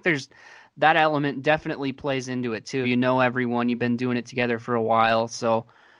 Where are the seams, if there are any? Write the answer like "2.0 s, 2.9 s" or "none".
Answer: 2.8 s

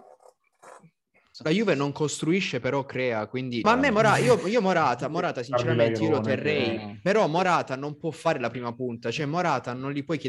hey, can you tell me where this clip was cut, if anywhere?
1.3 s, 3.6 s

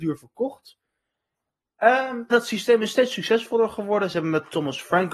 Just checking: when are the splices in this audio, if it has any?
2.3 s

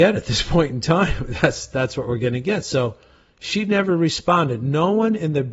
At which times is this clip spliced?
none

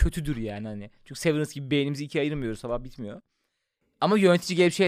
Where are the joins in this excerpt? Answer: none

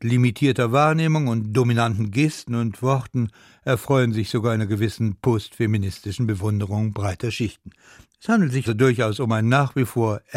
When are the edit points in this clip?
8.7 s

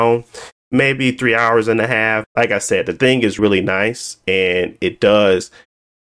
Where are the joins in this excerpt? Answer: 2.2 s, 3.4 s

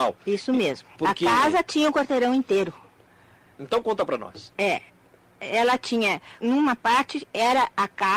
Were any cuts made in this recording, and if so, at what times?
0.9 s, 6.4 s

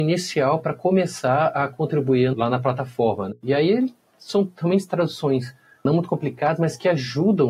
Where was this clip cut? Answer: none

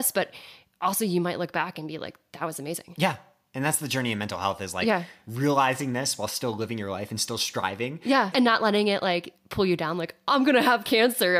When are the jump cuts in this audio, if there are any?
8.3 s

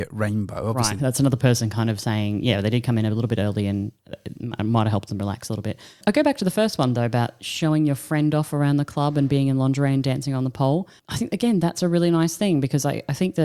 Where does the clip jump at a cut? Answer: 1.0 s

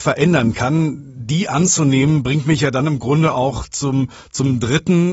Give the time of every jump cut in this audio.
none

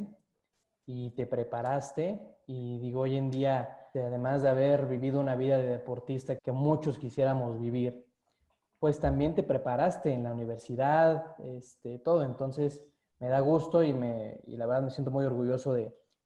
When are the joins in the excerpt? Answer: 3.9 s, 6.4 s

